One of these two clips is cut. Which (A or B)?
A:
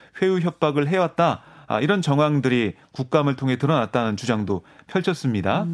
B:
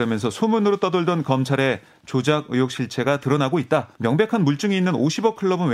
B